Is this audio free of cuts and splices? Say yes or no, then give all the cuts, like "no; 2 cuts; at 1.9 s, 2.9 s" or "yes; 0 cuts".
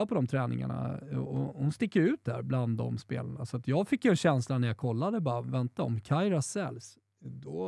yes; 0 cuts